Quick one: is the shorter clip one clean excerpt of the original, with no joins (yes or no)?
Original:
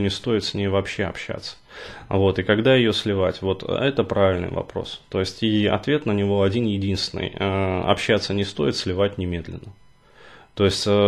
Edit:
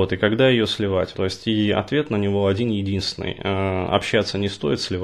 no